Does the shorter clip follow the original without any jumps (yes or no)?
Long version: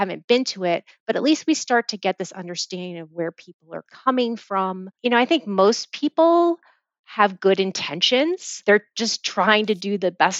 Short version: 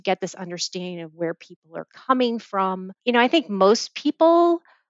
yes